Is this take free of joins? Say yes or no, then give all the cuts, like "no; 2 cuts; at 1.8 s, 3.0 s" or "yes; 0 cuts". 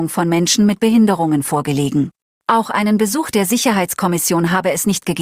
no; 1 cut; at 2.4 s